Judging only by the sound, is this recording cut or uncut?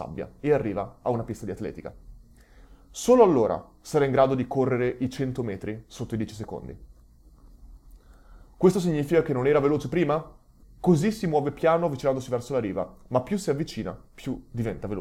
cut